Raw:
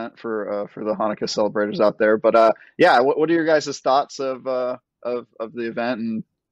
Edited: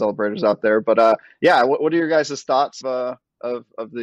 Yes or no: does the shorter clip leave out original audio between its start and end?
yes